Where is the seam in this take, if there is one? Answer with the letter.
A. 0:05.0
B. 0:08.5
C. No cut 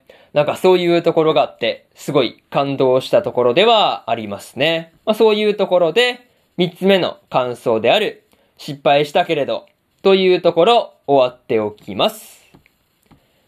A